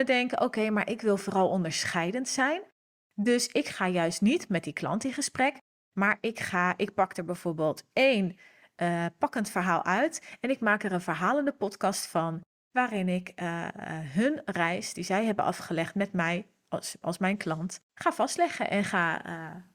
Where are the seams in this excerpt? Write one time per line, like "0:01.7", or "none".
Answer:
0:17.9